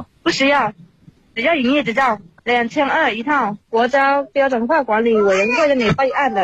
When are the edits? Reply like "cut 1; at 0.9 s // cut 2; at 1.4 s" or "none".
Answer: none